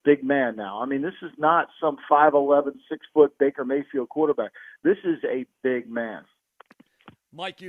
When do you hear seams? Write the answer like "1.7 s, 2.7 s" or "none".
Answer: 5.5 s